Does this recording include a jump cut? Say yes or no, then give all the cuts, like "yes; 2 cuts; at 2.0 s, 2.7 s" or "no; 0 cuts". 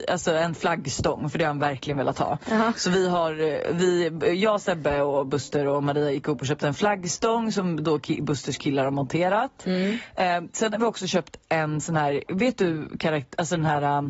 no; 0 cuts